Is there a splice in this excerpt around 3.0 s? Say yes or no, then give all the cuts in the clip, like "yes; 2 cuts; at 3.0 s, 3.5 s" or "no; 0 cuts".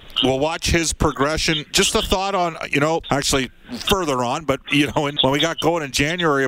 yes; 2 cuts; at 3.0 s, 5.2 s